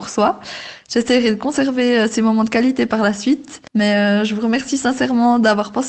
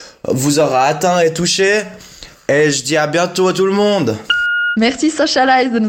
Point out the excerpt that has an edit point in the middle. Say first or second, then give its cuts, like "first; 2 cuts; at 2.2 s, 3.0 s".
first; 1 cut; at 3.7 s